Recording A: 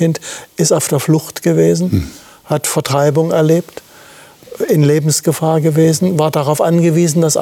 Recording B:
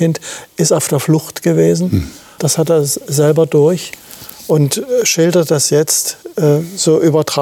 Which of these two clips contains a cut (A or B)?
B